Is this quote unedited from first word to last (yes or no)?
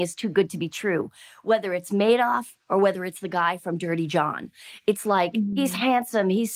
yes